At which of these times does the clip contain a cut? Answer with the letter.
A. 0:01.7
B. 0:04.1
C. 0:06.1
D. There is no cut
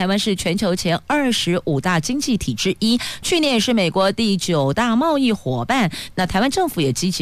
C